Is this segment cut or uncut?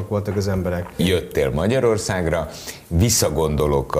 cut